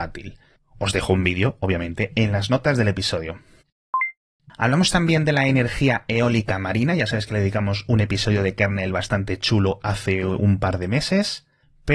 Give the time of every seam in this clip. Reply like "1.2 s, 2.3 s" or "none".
none